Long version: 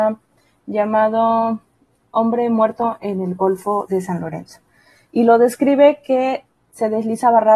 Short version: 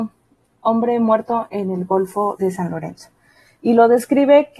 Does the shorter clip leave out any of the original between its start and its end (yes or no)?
no